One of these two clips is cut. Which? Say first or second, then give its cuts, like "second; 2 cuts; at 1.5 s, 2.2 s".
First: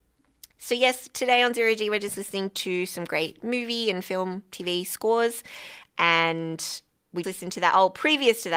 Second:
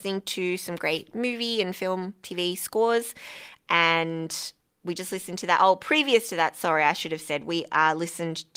first; 1 cut; at 7.2 s